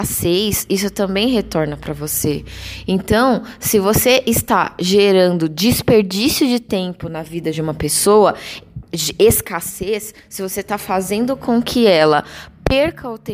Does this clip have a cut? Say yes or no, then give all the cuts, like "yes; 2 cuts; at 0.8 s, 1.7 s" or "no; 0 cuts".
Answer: no; 0 cuts